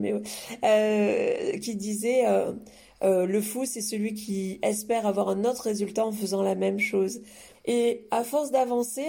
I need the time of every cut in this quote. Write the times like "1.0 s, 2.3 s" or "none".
7.5 s